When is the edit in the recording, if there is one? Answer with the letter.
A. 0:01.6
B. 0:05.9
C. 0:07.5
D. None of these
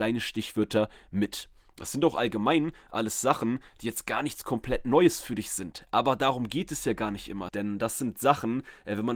C